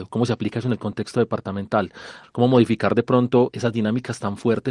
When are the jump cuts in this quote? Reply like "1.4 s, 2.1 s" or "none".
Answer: 2.2 s, 3.5 s